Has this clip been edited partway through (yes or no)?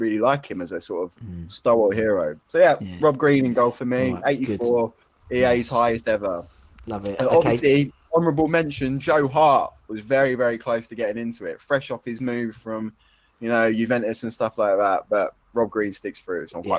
no